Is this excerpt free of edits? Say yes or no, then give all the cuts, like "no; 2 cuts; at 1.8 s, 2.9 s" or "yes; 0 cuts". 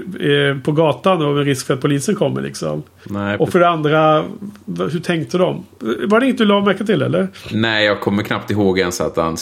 yes; 0 cuts